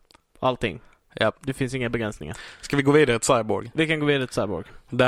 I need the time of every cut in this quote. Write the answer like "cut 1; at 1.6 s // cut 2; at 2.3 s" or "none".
none